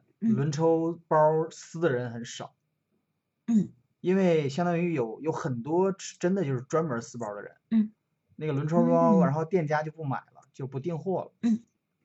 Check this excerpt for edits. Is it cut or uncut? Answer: uncut